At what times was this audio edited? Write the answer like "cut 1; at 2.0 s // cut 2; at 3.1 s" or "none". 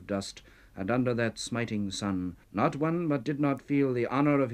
cut 1; at 2.4 s